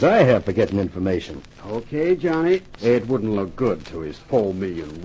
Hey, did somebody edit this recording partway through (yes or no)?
yes